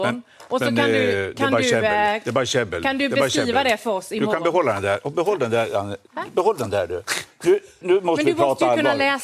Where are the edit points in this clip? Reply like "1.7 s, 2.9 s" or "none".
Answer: 7.8 s